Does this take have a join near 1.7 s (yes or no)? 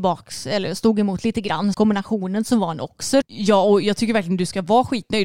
yes